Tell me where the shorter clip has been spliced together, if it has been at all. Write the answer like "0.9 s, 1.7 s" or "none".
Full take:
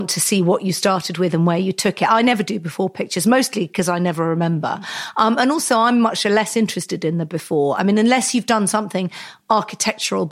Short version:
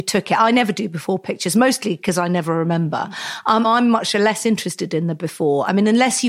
3.6 s